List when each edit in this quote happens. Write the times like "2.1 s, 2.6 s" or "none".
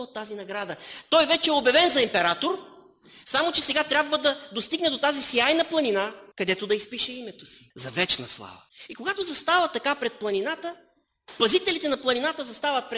none